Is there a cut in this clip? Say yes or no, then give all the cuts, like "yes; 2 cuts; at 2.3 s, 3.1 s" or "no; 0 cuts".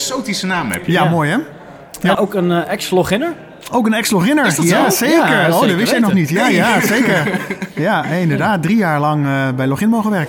yes; 1 cut; at 2.1 s